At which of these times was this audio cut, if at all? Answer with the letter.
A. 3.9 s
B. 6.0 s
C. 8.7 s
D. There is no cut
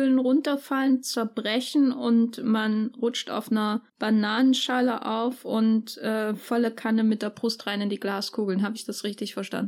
A